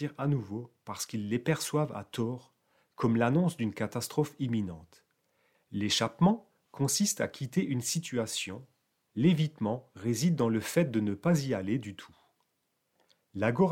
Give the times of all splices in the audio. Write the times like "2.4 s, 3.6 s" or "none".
5.5 s